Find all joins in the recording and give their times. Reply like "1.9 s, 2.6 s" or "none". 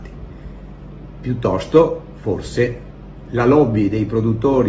none